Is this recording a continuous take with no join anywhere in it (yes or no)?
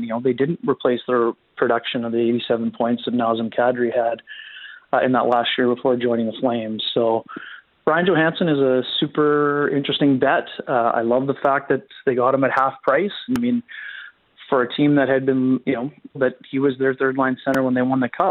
no